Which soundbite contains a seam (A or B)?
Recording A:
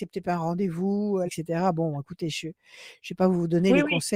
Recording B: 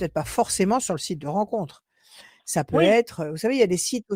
A